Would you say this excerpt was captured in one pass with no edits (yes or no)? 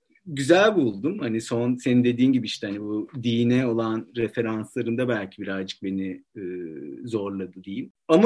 yes